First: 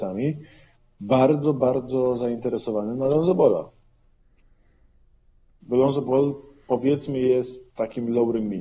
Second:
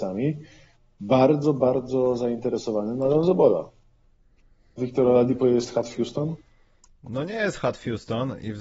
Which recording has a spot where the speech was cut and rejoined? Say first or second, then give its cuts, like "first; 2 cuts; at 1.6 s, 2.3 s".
second; 1 cut; at 4.8 s